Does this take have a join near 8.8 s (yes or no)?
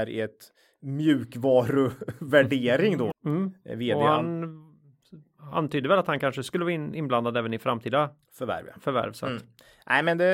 no